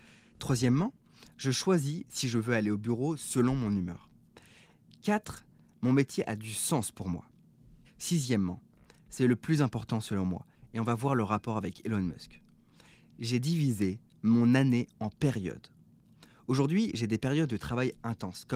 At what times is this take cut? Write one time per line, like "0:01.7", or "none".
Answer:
0:07.8